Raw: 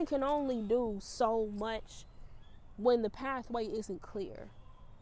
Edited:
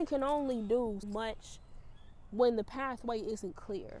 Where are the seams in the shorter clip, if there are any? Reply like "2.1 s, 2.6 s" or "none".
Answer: 1.0 s